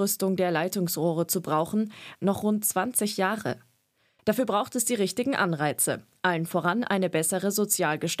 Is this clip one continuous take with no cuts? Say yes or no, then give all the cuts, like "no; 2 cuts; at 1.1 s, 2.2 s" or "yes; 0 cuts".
no; 2 cuts; at 2.2 s, 4.2 s